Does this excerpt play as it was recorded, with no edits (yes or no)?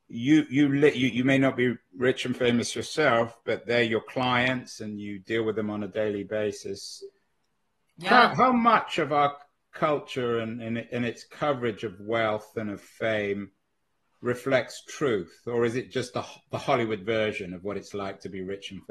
yes